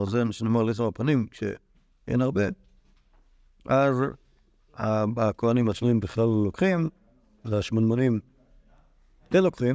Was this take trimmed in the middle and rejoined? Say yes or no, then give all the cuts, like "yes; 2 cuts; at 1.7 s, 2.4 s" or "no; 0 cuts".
no; 0 cuts